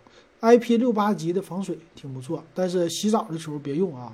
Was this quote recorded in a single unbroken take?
yes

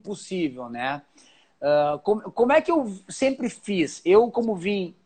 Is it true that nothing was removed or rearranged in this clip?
yes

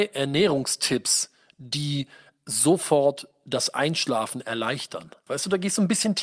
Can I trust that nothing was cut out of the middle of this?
no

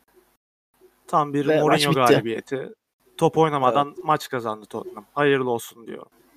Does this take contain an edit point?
no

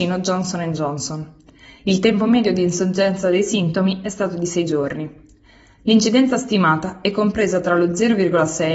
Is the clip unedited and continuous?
yes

